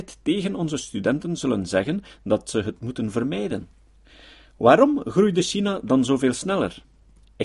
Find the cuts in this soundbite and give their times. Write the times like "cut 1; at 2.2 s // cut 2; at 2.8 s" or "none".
none